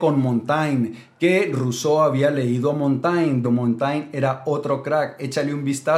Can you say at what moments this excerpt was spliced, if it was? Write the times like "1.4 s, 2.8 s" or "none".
3.4 s